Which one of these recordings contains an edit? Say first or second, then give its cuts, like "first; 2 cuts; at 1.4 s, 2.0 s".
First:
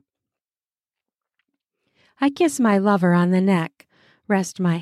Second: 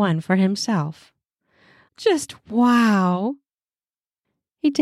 second; 1 cut; at 1.9 s